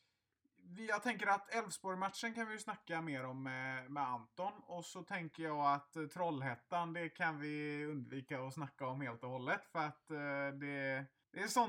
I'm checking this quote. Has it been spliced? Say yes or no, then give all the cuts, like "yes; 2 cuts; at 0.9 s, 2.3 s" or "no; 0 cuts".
no; 0 cuts